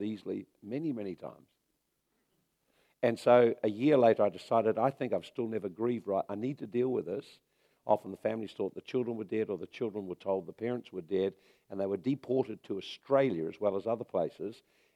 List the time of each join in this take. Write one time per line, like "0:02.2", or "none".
0:07.7